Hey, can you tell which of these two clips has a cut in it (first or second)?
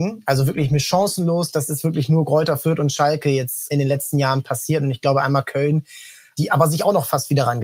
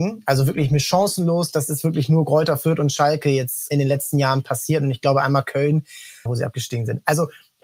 second